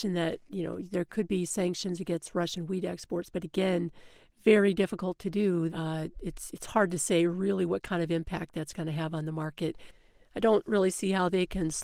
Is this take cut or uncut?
cut